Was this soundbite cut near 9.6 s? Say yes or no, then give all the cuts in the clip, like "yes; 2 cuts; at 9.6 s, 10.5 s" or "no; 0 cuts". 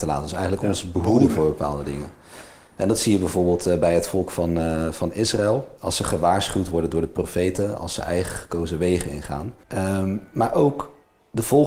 yes; 1 cut; at 9.6 s